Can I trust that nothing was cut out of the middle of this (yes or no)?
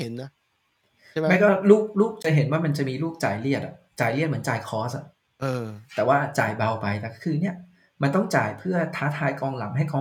yes